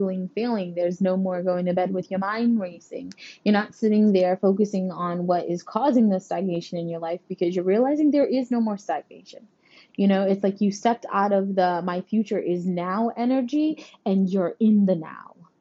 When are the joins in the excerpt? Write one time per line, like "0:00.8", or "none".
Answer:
none

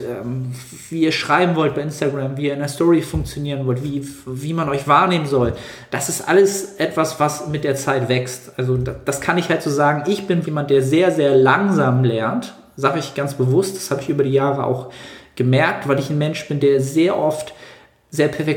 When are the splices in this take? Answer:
0:10.4

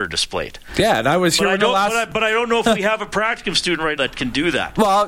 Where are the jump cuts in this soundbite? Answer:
0:04.0

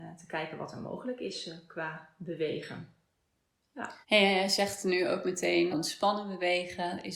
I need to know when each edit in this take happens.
0:04.0
0:05.7

